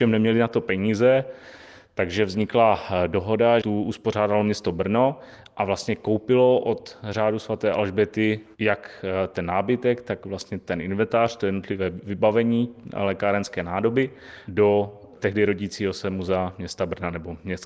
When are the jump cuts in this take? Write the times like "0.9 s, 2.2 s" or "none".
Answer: 3.6 s